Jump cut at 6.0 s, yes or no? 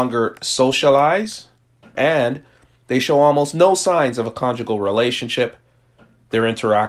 no